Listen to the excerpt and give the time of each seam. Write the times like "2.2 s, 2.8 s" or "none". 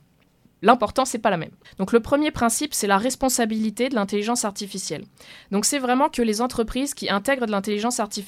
1.6 s

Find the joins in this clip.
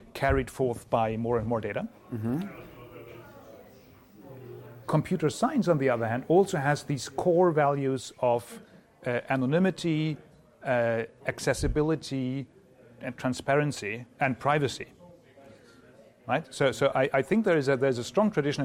11.2 s

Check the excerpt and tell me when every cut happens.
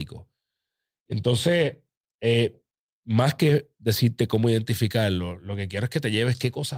none

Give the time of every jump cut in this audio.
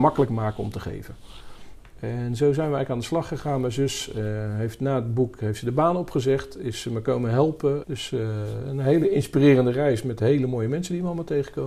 7.8 s

